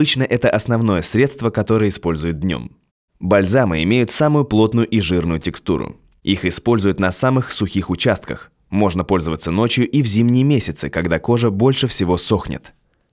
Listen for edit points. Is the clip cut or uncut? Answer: uncut